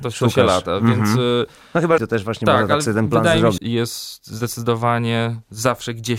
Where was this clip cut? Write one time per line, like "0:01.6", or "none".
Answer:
0:02.0
0:03.6